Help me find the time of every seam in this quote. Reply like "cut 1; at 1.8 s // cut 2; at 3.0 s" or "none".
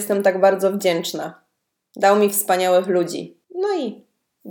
cut 1; at 3.4 s